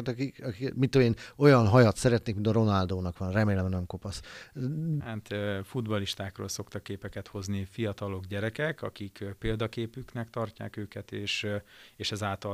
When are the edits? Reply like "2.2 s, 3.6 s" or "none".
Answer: 5.0 s

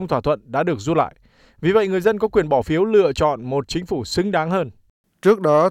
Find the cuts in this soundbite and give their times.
none

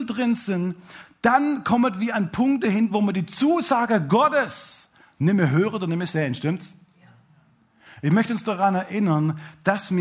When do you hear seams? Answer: none

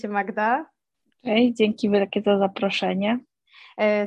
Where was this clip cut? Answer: none

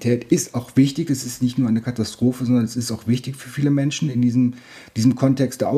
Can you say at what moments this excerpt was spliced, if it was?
none

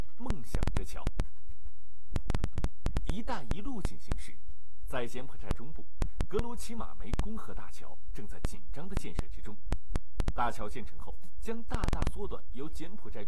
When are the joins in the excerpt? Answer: 2.6 s

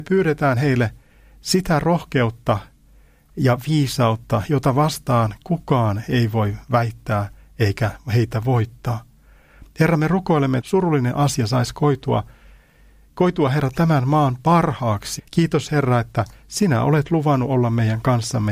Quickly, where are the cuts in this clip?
10.6 s, 15.2 s

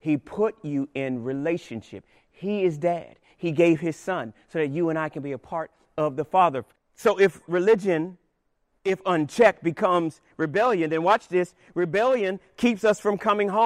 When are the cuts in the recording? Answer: 6.8 s

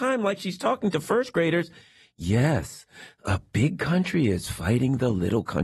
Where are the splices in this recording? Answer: none

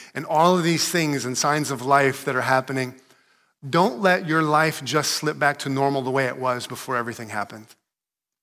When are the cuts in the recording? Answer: none

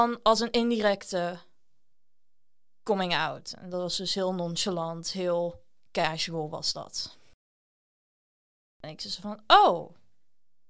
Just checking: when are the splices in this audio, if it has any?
8.8 s

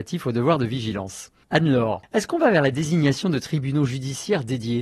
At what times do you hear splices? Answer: none

